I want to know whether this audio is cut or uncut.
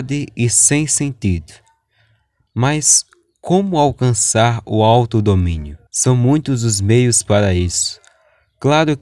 cut